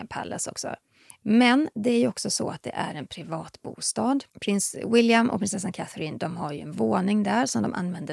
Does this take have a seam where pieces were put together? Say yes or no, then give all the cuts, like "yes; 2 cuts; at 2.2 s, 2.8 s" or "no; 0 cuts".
yes; 2 cuts; at 1.1 s, 4.3 s